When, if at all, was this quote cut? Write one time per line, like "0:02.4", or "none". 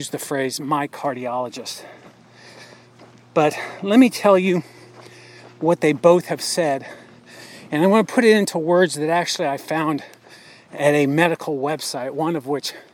none